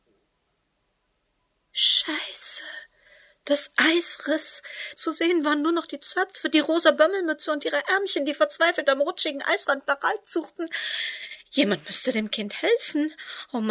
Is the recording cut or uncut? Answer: cut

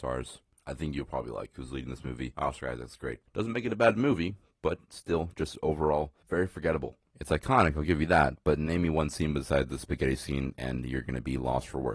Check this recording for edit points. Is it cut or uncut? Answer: cut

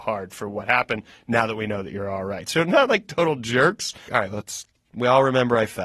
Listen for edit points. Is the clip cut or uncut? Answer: cut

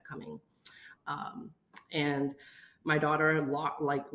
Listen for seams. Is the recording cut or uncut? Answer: cut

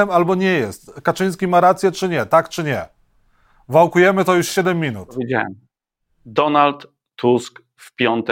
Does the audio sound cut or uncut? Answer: uncut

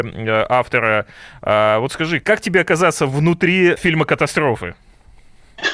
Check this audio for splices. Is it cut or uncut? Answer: cut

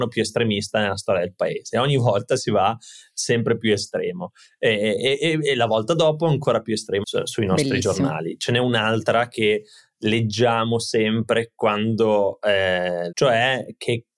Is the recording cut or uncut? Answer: cut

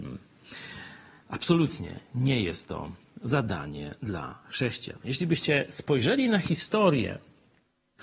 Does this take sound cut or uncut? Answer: uncut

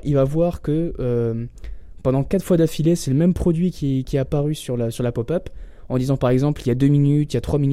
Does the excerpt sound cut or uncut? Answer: uncut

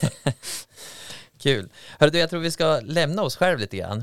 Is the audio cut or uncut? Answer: uncut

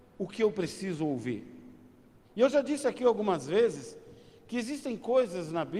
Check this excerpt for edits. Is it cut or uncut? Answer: cut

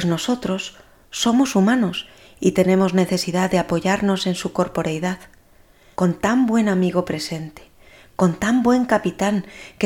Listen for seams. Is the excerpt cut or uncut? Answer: cut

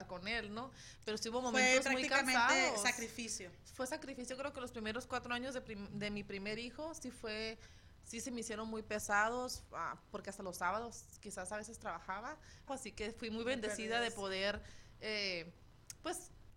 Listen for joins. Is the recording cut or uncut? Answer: cut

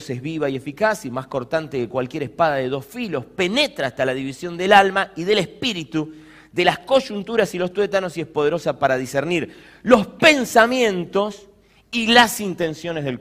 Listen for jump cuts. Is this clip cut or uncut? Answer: uncut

